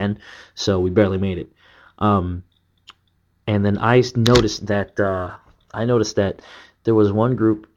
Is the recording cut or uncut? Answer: uncut